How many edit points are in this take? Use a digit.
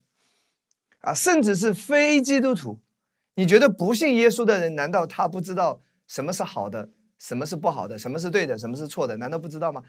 0